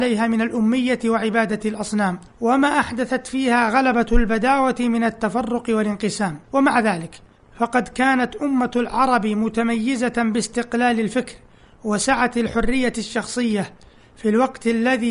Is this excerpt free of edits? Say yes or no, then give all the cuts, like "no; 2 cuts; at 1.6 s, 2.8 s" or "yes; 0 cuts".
no; 2 cuts; at 2.3 s, 6.4 s